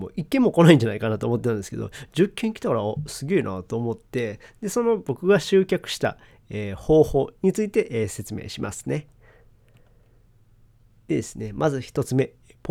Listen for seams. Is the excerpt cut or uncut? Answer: uncut